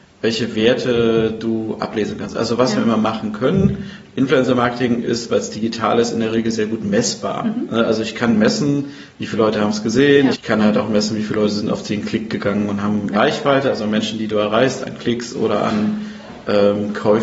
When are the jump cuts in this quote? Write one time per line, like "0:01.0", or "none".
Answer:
0:10.3
0:13.1